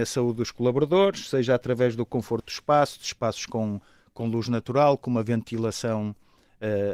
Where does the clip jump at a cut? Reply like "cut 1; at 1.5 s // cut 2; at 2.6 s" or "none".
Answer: none